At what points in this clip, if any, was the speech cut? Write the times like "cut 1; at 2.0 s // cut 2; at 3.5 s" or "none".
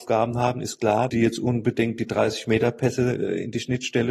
cut 1; at 1.1 s